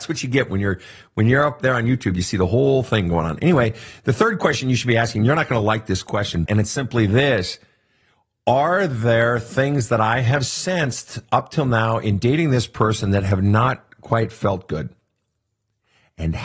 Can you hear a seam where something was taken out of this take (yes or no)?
yes